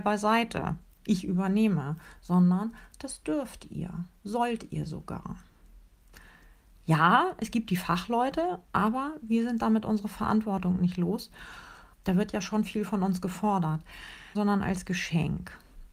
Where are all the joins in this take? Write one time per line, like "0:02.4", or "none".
0:11.9
0:14.3